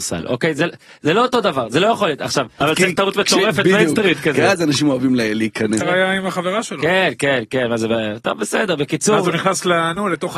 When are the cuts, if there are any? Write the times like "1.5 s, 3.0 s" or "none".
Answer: 2.6 s, 5.8 s